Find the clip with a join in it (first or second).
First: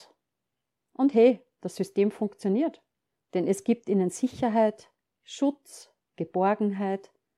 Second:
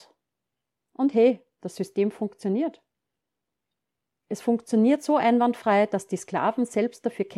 first